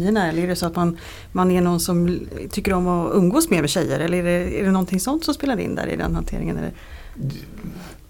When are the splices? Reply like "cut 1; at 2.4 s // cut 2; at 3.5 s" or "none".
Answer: none